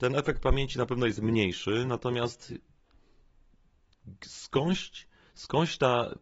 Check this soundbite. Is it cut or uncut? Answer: uncut